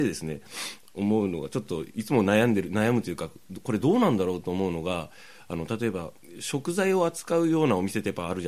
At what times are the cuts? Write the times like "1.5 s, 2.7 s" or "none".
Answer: none